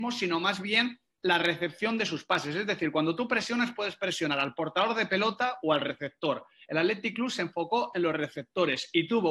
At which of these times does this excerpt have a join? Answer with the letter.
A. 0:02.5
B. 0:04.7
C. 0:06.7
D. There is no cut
D